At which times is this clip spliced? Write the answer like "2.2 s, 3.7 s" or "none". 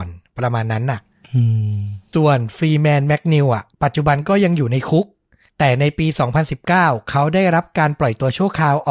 2.1 s, 3.7 s